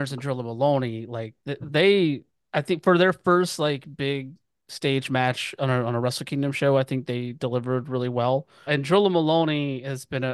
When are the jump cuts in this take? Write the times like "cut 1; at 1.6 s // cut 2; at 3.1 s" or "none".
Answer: cut 1; at 8.7 s